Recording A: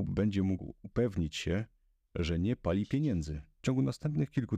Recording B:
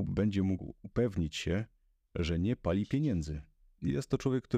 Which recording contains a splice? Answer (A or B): A